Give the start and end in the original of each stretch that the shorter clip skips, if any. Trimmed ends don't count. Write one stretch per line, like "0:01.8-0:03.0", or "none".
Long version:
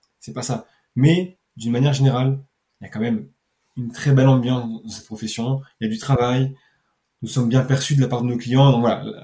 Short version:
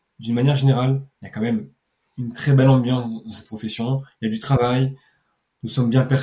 0:02.5-0:02.7